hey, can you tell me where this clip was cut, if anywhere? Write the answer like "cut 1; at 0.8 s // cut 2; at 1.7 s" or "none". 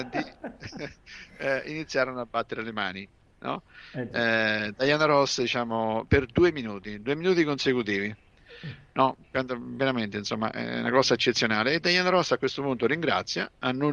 none